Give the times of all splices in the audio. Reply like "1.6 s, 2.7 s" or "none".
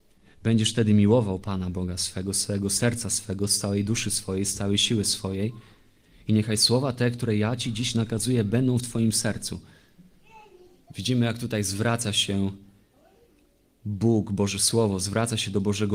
none